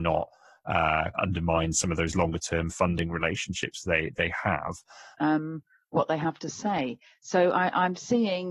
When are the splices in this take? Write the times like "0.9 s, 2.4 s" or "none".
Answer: 1.1 s, 5.1 s

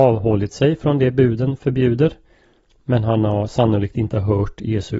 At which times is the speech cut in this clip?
none

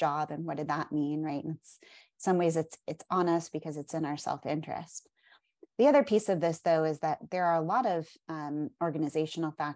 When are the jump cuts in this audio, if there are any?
none

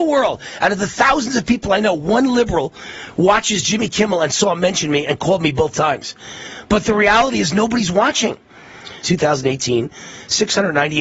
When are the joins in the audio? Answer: 9.0 s

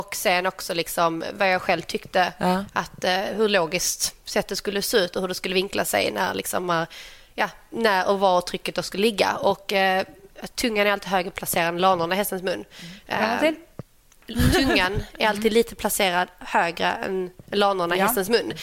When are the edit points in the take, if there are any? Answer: none

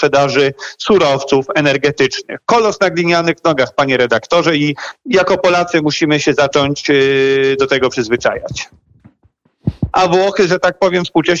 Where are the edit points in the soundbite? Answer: 9.9 s

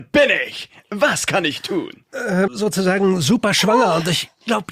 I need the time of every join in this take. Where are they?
2.5 s

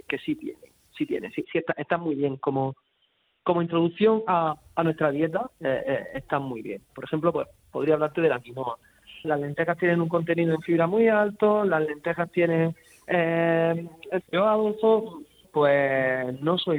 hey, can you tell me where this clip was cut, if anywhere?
9.2 s, 14.2 s, 15.4 s

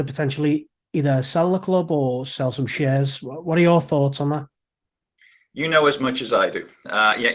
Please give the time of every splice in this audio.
none

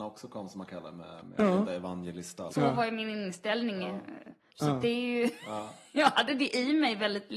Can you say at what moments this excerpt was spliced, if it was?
2.5 s, 4.5 s

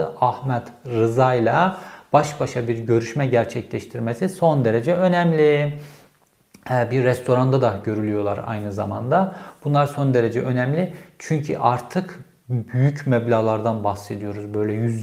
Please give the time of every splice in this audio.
none

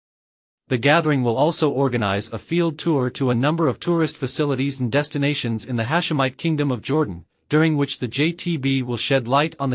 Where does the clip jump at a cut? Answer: none

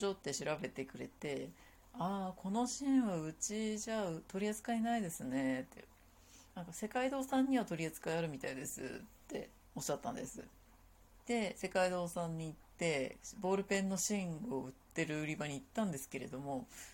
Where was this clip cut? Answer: 11.2 s

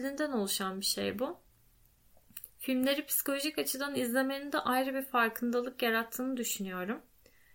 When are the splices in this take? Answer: 2.5 s

